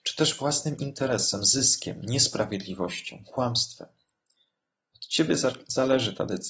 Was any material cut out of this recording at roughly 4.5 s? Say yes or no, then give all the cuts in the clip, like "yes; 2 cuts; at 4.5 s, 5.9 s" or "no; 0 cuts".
no; 0 cuts